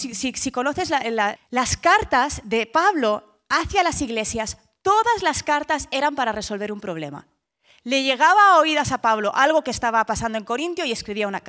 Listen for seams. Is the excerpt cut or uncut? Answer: cut